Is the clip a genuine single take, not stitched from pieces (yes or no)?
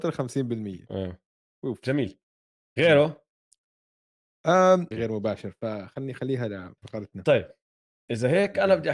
no